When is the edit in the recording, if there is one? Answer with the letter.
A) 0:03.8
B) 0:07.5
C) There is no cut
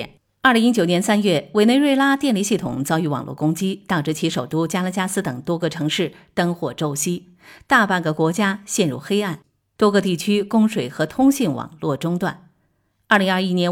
C